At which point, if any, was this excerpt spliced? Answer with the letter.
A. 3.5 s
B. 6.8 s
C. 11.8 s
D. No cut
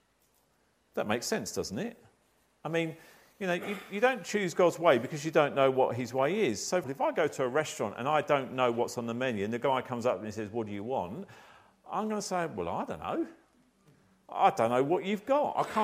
B